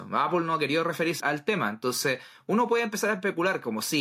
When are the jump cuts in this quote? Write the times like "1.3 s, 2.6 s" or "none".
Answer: 1.2 s